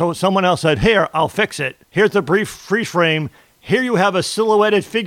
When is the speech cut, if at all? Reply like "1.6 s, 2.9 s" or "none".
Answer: 1.8 s